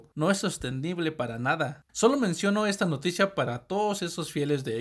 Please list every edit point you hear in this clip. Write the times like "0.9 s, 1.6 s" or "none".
1.9 s